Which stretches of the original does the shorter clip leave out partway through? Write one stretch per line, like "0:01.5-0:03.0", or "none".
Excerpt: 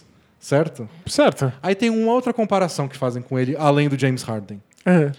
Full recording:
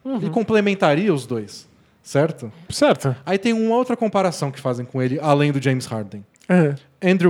none